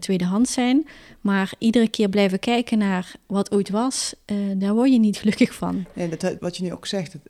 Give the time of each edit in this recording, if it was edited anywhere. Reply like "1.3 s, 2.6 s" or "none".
6.4 s

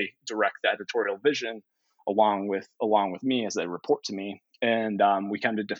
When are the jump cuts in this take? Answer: none

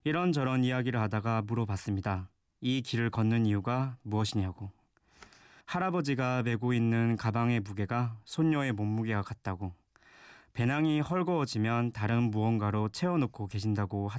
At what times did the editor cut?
5.6 s

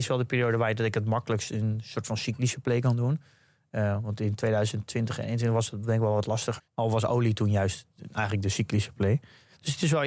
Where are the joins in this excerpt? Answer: 6.6 s

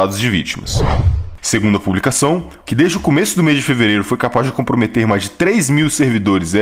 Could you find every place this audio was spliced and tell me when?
1.4 s, 2.6 s

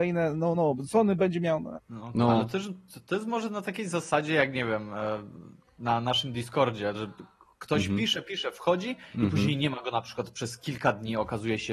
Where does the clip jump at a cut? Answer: 1.7 s, 6.9 s

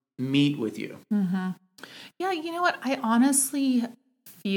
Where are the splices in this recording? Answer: none

